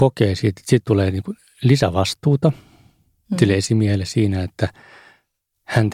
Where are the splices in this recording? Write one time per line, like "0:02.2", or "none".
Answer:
none

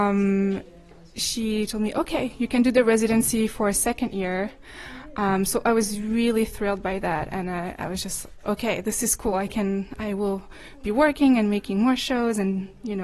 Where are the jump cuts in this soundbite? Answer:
none

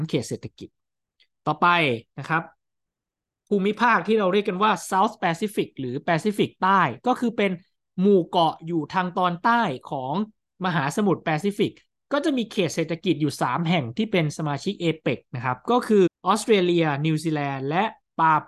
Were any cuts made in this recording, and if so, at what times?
0:16.1

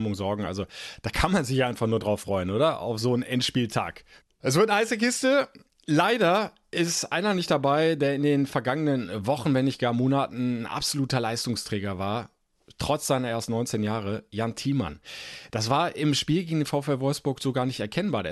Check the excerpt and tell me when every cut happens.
none

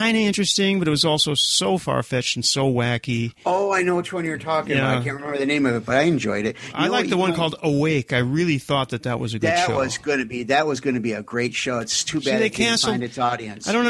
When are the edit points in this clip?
none

